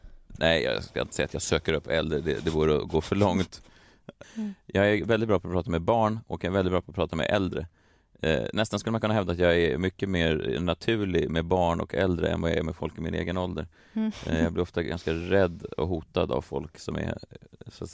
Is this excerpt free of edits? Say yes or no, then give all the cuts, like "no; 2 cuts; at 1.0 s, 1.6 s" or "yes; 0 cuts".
no; 1 cut; at 4.2 s